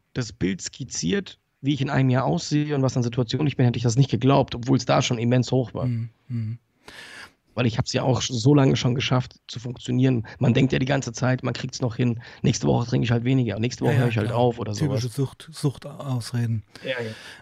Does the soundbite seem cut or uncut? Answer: uncut